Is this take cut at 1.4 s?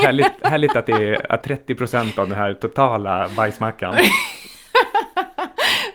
yes; 1 cut; at 1.4 s

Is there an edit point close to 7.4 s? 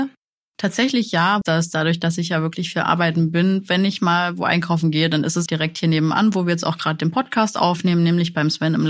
no; 2 cuts; at 1.4 s, 5.5 s

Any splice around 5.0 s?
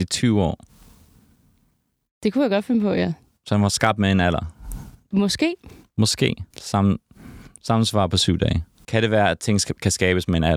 no; 2 cuts; at 6.5 s, 8.8 s

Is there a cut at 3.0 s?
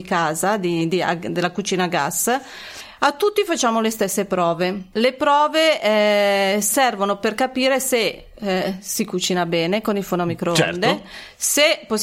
no; 0 cuts

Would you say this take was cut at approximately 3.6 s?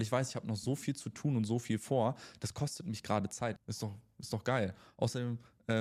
yes; 1 cut; at 3.6 s

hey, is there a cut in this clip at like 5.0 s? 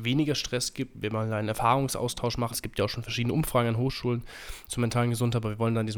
no; 1 cut; at 2.5 s

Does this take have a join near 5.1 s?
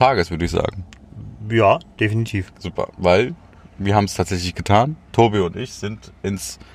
no; 0 cuts

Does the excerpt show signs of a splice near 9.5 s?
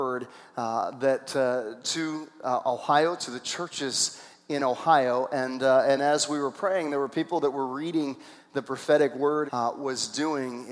yes; 1 cut; at 9.5 s

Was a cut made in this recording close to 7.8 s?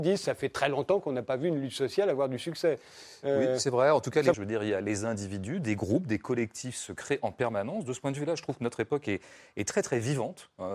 no; 1 cut; at 4.3 s

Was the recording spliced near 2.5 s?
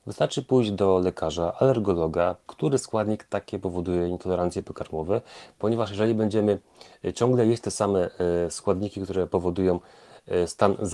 yes; 1 cut; at 2.5 s

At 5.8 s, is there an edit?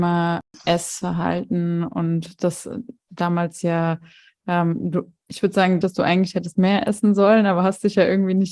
yes; 1 cut; at 5.8 s

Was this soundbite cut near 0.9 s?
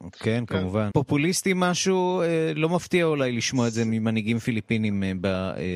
yes; 1 cut; at 0.9 s

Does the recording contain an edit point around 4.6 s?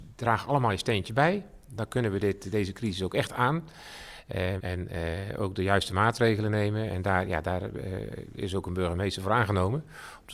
yes; 1 cut; at 4.6 s

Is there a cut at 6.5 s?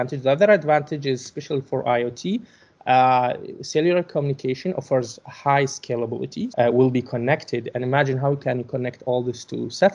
yes; 1 cut; at 6.5 s

